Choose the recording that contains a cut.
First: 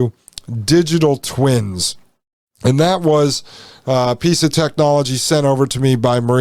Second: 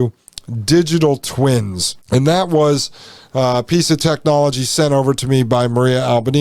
second; 1 cut; at 2.0 s

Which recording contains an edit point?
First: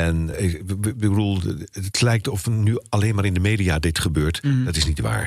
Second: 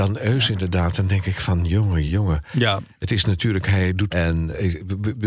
second; 2 cuts; at 2.1 s, 4.1 s

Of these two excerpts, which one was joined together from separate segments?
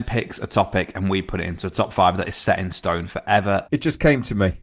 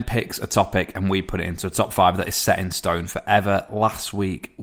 first; 1 cut; at 3.7 s

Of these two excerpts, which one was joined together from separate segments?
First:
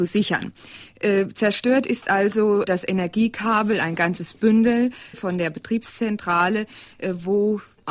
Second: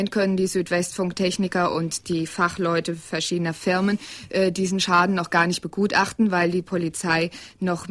first; 2 cuts; at 2.6 s, 5.1 s

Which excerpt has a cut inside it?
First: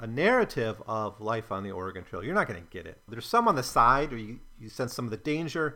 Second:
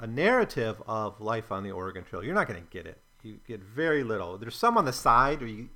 first; 1 cut; at 3.1 s

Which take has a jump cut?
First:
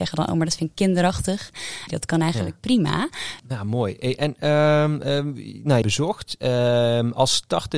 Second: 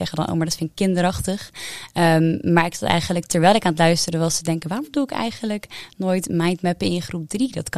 first; 3 cuts; at 1.9 s, 3.4 s, 5.8 s

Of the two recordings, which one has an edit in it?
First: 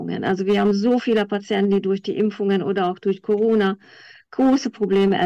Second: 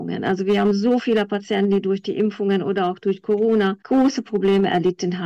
second; 1 cut; at 3.8 s

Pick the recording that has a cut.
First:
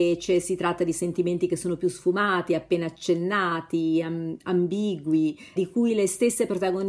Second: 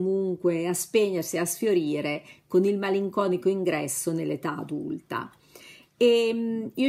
first; 1 cut; at 5.6 s

